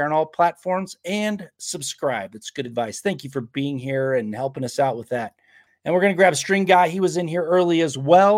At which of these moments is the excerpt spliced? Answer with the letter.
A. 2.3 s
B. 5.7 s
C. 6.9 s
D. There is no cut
B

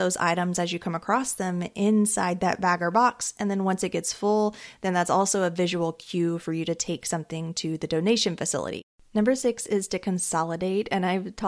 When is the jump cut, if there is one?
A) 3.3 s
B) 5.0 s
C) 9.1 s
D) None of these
D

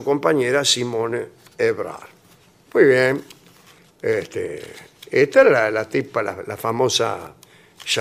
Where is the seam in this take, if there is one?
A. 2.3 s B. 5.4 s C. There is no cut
C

